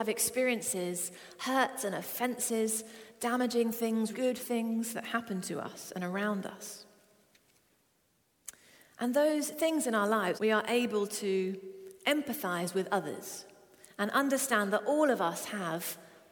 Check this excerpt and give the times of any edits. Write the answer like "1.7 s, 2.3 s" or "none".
4.1 s, 10.4 s